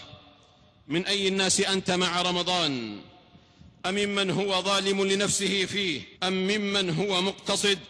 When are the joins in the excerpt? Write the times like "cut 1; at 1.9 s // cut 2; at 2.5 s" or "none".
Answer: cut 1; at 6.1 s